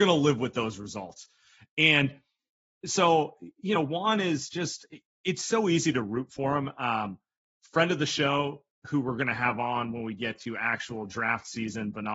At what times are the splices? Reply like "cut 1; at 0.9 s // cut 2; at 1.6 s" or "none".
none